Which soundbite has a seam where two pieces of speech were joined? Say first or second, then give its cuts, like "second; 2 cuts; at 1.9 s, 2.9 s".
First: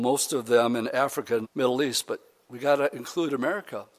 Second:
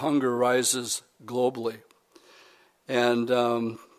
first; 1 cut; at 1.4 s